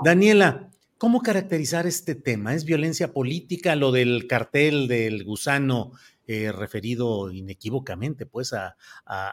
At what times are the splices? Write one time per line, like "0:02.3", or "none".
none